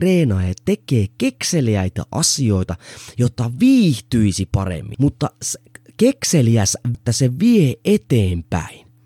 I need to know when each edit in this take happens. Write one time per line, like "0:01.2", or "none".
0:04.9
0:06.9